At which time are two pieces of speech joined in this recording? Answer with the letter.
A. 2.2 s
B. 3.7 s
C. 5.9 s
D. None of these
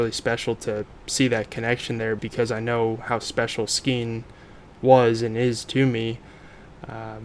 A